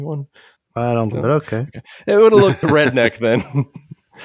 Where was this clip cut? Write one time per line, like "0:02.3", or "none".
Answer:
0:01.1
0:02.6